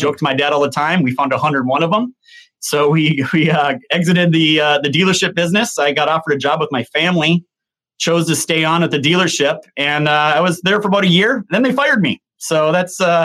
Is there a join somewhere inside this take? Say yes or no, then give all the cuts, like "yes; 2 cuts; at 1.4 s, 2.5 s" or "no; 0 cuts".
no; 0 cuts